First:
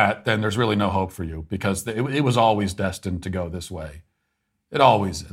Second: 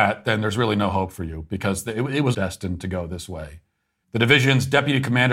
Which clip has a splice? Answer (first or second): second